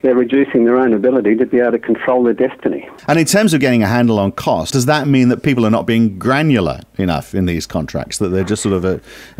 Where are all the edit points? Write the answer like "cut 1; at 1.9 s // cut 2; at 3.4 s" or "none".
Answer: cut 1; at 3.0 s // cut 2; at 4.7 s